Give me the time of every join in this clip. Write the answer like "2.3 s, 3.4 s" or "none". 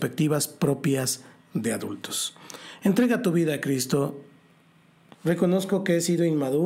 5.1 s